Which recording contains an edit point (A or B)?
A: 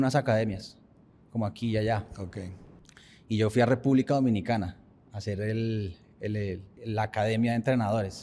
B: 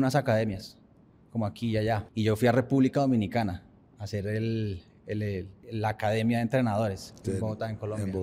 B